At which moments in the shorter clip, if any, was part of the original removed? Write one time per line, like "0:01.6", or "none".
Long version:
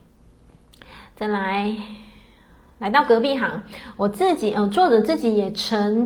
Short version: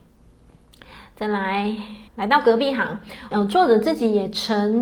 0:02.1
0:03.3